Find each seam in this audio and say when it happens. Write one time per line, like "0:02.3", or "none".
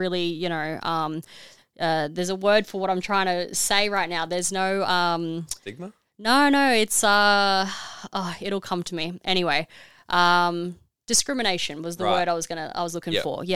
none